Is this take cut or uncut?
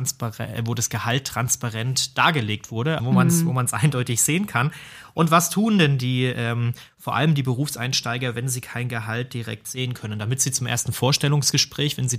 cut